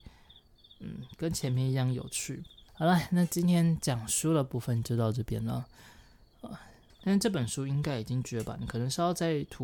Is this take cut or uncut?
cut